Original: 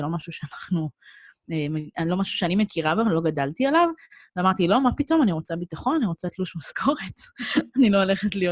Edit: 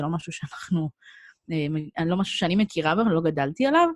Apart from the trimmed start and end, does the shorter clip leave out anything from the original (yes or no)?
no